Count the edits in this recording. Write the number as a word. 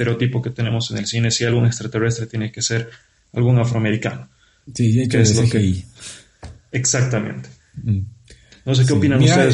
zero